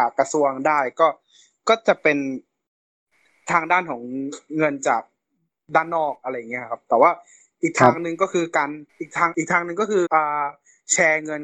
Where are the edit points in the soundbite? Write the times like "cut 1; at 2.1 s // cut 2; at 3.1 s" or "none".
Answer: cut 1; at 8.9 s // cut 2; at 10.1 s